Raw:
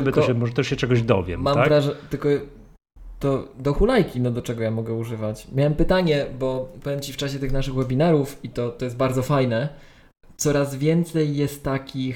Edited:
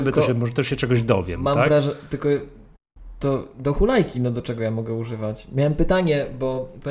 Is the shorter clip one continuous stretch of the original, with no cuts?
yes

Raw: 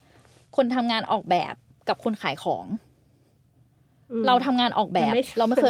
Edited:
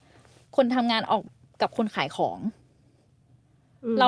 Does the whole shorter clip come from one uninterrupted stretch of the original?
no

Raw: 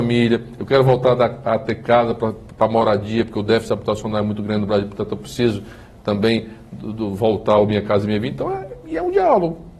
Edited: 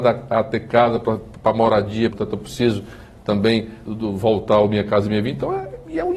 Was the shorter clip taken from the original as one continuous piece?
no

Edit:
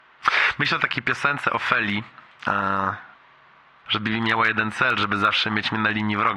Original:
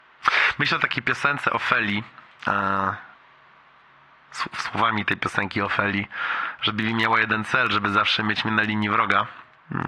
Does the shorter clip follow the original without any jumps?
no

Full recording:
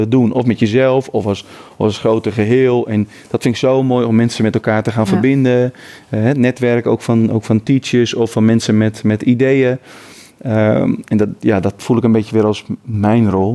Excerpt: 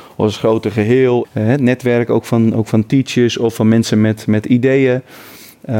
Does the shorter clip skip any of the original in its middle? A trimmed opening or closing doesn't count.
yes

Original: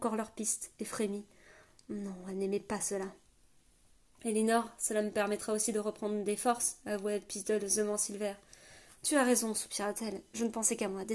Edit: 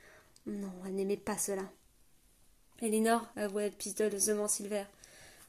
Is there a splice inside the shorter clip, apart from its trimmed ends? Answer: yes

